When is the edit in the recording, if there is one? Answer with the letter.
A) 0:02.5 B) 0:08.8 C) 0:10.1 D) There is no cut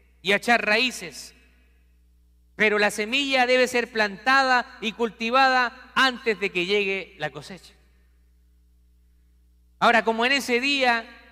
D